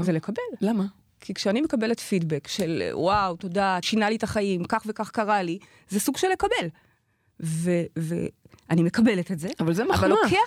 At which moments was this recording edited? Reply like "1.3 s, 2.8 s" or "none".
3.8 s